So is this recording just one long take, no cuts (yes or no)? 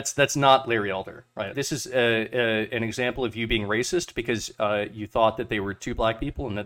no